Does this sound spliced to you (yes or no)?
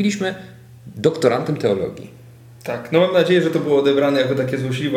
no